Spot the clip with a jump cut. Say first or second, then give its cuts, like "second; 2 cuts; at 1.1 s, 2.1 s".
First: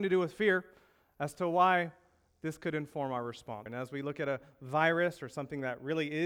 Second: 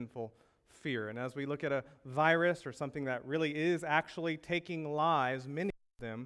first; 1 cut; at 3.7 s